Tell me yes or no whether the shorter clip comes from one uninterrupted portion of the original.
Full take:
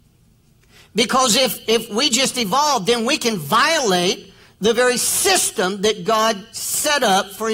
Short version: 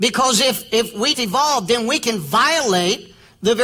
no